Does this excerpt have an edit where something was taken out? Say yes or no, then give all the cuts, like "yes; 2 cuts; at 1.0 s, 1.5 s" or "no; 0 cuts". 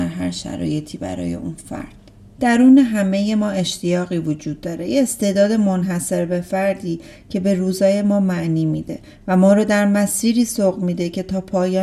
yes; 1 cut; at 2.3 s